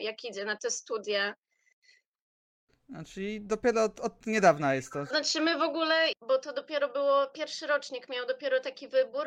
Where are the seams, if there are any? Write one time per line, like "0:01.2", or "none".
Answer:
0:05.1
0:06.1